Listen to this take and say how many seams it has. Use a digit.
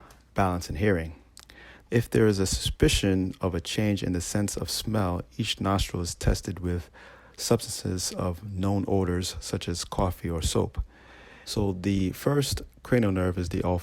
2